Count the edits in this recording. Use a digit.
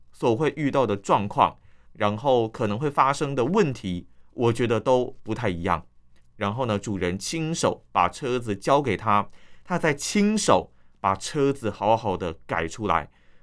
2